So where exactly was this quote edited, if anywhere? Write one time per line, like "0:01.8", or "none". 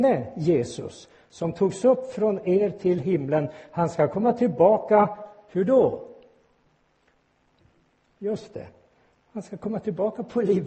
none